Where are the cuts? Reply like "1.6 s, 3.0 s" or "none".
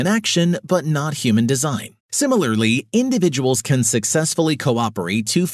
2.0 s